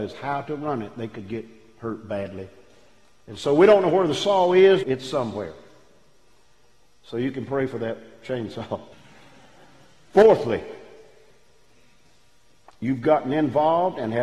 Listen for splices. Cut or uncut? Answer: cut